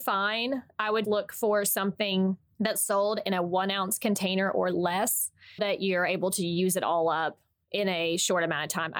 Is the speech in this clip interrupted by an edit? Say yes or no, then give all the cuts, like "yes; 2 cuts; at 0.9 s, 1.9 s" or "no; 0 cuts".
yes; 2 cuts; at 1.0 s, 5.6 s